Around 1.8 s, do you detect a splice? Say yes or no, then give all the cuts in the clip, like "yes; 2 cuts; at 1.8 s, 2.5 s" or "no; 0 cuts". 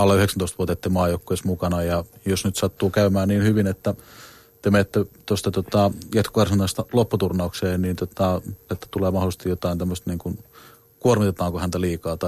no; 1 cut; at 8.7 s